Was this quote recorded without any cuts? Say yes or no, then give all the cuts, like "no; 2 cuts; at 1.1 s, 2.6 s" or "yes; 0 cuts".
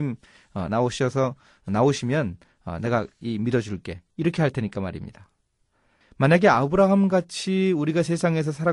no; 1 cut; at 6.0 s